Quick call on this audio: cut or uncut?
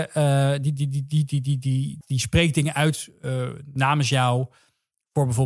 cut